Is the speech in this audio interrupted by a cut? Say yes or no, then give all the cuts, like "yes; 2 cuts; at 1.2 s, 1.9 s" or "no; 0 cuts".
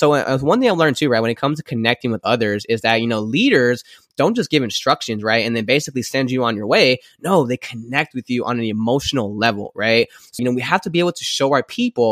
yes; 1 cut; at 10.4 s